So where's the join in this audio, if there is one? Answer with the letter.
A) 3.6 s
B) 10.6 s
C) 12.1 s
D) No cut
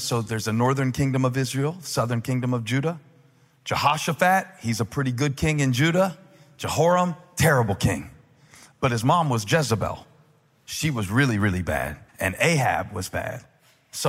C